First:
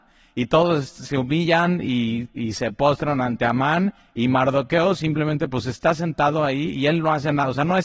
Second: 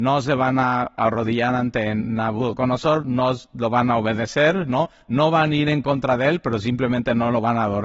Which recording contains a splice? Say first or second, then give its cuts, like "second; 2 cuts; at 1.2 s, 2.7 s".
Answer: second; 1 cut; at 3.0 s